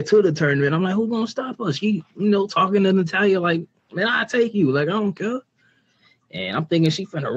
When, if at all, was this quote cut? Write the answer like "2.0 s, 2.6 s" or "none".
none

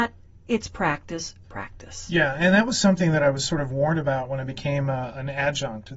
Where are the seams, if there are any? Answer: 1.4 s

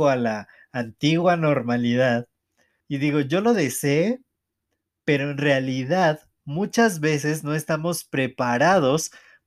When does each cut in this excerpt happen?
2.8 s

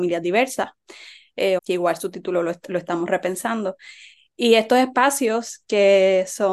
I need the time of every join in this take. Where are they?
1.6 s

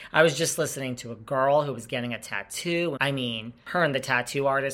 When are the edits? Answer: 3.0 s

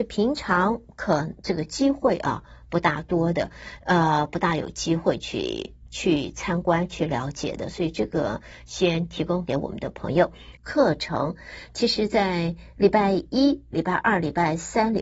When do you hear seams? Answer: 10.6 s, 13.7 s

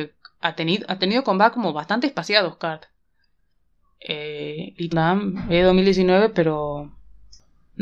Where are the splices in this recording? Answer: 4.9 s

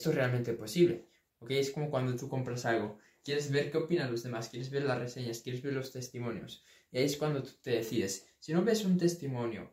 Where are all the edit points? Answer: 1.3 s

